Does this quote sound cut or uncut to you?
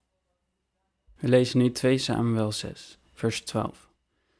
uncut